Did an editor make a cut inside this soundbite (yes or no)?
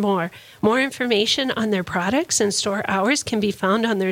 no